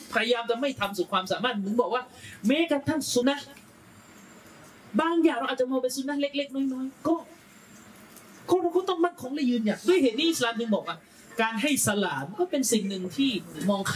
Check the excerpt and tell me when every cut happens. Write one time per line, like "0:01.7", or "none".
0:03.2